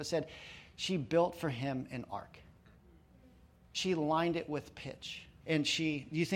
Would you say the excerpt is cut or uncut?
cut